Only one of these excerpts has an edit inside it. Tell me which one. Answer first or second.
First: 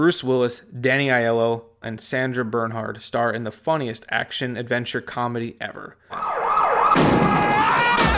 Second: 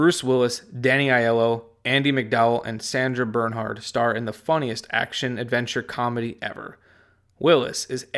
first